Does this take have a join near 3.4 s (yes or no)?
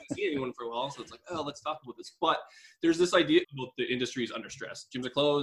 yes